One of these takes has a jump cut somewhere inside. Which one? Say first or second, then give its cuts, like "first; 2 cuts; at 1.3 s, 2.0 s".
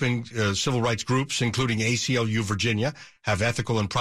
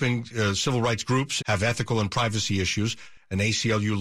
second; 1 cut; at 1.4 s